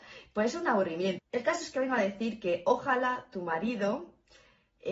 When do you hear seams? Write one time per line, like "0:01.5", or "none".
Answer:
0:01.2